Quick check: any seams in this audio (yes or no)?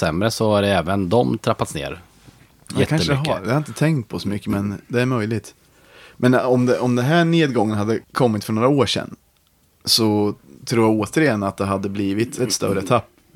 yes